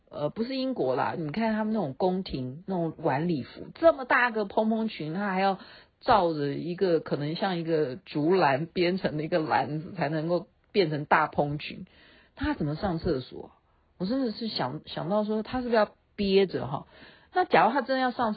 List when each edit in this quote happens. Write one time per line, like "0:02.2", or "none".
0:01.2